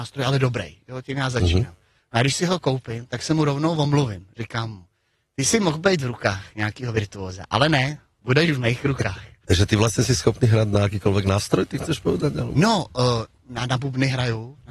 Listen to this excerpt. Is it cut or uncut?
uncut